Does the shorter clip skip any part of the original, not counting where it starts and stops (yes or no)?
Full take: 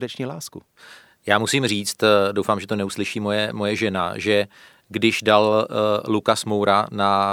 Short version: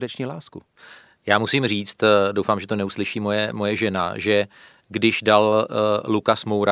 no